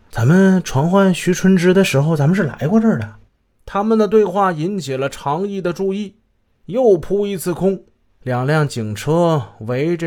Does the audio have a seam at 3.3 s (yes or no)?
no